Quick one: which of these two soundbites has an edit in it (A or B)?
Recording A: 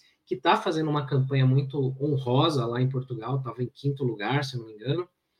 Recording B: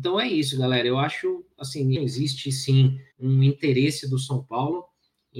B